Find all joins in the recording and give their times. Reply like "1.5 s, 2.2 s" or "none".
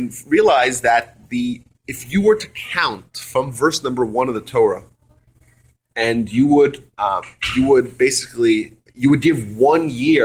6.9 s, 8.9 s